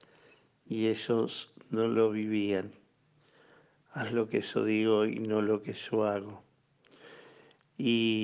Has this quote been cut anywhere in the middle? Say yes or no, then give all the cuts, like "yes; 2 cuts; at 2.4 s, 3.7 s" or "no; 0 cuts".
no; 0 cuts